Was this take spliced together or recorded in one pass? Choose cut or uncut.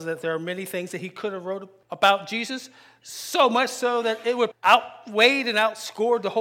cut